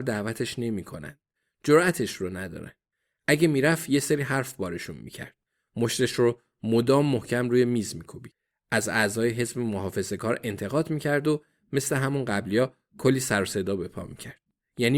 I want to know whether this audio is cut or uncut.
uncut